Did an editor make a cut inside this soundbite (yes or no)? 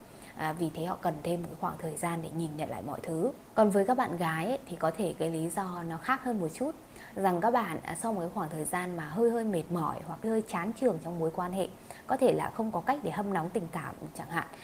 yes